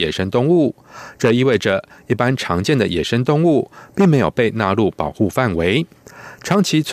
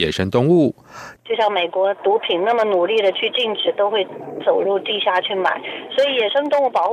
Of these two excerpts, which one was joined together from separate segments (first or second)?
second